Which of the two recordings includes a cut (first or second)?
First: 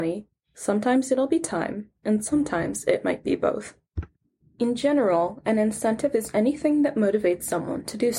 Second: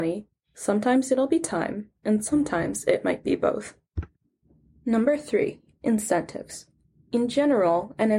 first